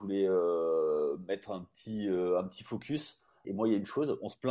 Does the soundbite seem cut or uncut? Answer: cut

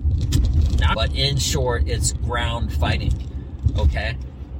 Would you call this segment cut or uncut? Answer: cut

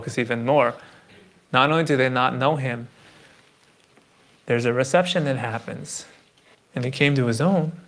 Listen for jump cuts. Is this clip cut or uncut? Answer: cut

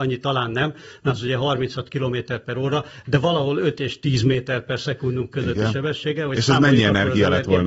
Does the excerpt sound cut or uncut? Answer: uncut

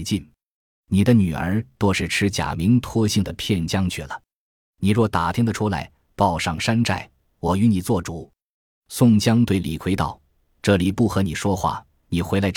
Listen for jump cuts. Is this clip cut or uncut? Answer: uncut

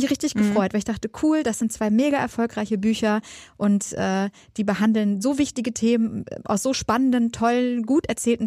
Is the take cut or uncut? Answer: uncut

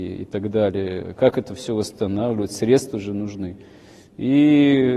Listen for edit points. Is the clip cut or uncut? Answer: uncut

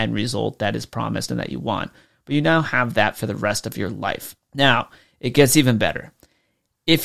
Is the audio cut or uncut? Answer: cut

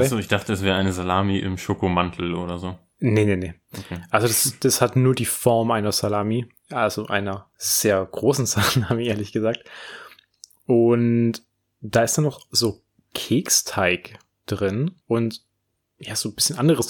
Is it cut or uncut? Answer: cut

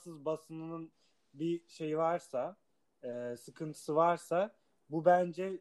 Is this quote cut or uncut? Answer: uncut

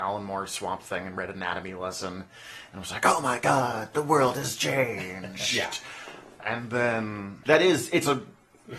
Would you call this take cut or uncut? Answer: cut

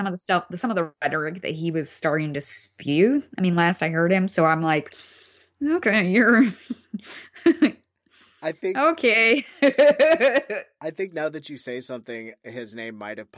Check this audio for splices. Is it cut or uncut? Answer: uncut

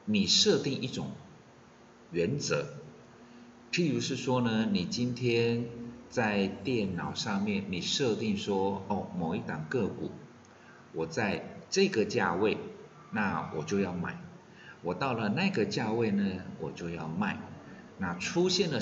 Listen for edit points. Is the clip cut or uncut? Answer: uncut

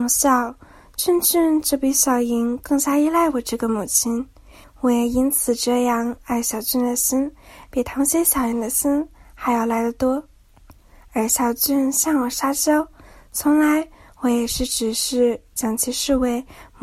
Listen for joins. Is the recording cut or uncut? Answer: cut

